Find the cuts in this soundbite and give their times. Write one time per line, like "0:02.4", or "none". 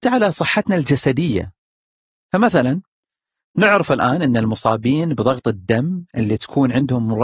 none